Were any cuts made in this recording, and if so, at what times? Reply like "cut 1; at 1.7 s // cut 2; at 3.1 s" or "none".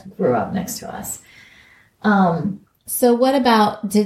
none